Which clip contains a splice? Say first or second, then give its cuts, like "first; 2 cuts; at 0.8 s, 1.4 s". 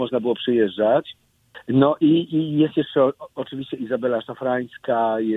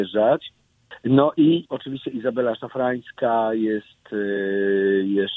second; 1 cut; at 1.6 s